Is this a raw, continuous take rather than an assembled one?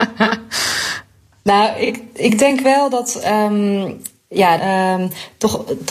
no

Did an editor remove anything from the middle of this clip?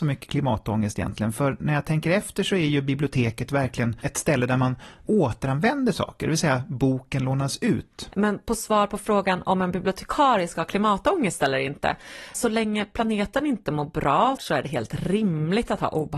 yes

